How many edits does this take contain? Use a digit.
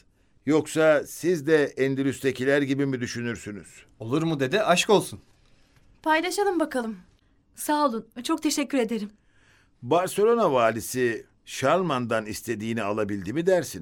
0